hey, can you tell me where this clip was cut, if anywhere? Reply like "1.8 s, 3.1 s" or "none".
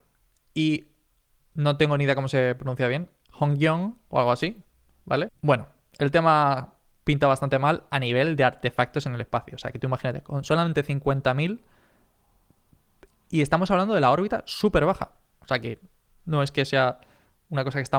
5.3 s